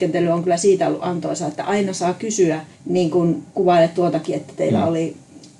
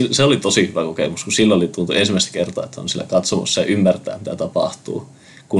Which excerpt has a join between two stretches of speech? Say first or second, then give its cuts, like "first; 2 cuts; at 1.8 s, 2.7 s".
first; 1 cut; at 2.7 s